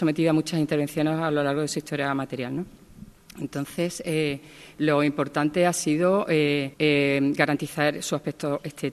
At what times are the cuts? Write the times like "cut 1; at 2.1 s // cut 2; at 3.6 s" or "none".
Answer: cut 1; at 6.7 s